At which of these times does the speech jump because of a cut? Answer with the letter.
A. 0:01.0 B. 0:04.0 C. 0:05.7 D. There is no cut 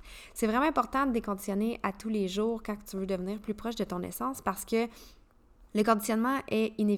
C